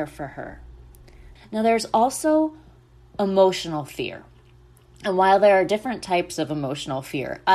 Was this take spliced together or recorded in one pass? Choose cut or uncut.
cut